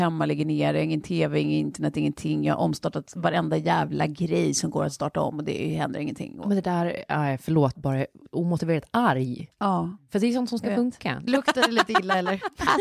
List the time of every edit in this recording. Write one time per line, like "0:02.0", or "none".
0:07.7
0:11.3